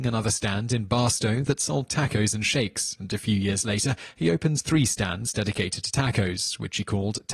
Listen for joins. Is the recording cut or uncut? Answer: uncut